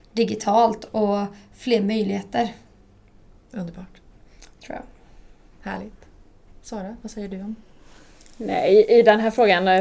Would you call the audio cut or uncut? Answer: uncut